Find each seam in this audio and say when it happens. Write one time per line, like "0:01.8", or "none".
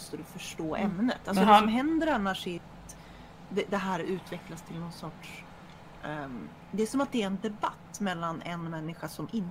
none